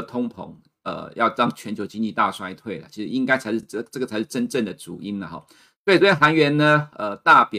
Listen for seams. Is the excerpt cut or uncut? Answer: uncut